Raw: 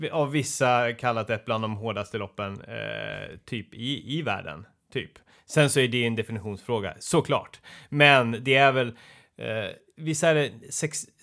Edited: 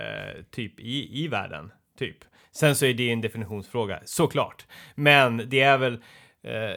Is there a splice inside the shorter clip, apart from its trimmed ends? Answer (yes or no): no